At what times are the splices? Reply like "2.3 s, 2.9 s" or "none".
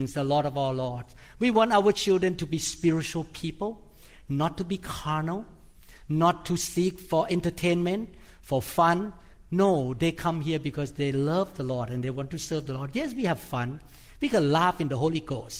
none